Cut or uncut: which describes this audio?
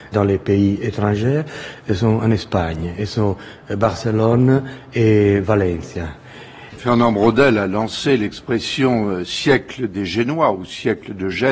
cut